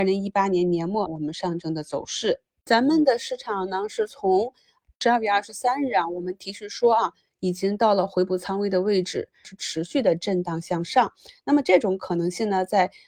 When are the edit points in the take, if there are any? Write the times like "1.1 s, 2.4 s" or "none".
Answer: 1.1 s, 9.4 s